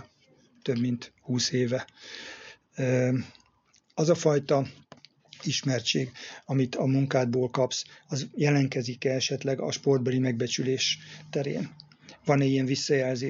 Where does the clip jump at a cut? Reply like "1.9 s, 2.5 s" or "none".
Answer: none

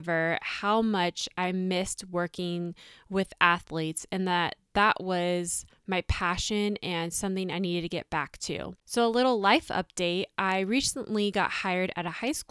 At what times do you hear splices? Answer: 8.8 s

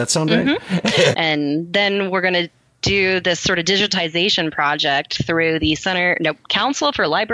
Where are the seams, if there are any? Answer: 1.1 s

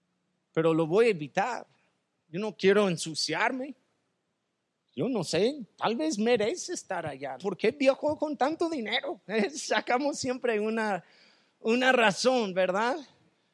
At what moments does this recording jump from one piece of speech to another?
7.4 s

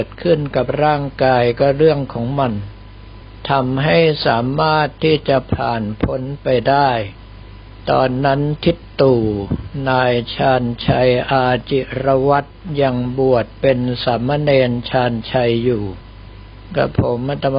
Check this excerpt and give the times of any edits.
none

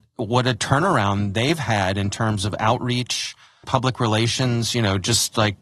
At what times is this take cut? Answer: 3.6 s

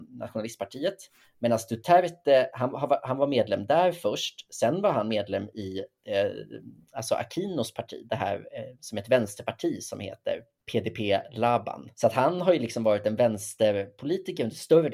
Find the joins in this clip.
11.9 s

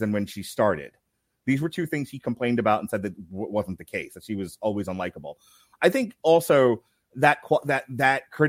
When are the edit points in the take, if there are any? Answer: none

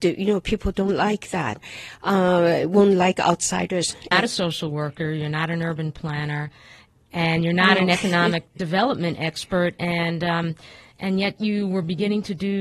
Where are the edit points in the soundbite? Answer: 4.1 s

